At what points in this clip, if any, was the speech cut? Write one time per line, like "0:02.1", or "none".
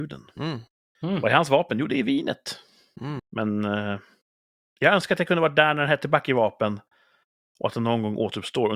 0:03.2